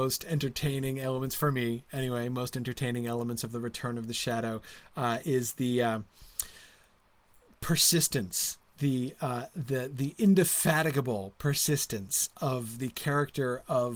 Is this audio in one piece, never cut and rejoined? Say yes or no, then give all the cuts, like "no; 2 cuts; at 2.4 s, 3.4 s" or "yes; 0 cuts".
yes; 0 cuts